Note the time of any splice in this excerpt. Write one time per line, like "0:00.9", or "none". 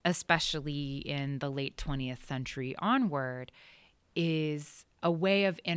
none